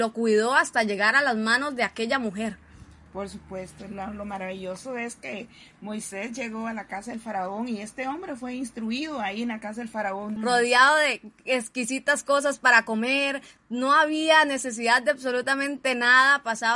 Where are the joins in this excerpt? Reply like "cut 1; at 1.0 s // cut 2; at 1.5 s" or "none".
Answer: cut 1; at 10.4 s